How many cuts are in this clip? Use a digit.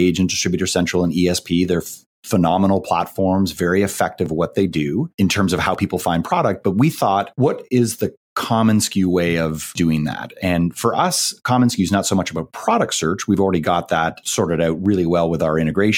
0